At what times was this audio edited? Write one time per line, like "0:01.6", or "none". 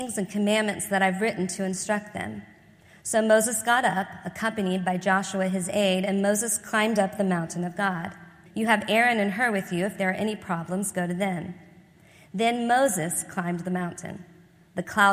0:08.5